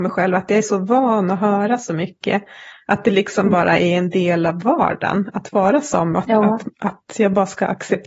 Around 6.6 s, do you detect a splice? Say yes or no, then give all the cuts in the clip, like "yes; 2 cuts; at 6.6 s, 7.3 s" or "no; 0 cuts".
no; 0 cuts